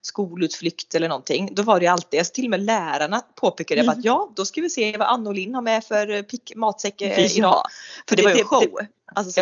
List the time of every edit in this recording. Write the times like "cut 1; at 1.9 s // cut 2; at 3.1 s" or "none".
none